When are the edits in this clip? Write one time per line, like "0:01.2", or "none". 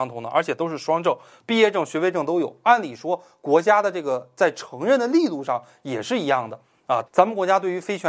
0:07.1